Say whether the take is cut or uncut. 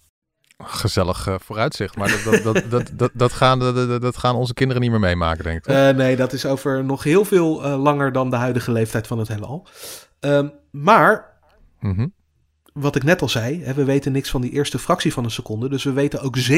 uncut